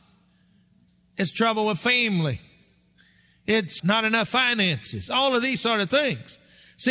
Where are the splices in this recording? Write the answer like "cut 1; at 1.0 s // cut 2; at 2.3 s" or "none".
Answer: cut 1; at 3.8 s